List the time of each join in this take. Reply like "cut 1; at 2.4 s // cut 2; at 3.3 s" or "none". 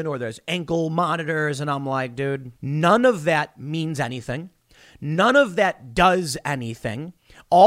cut 1; at 2.6 s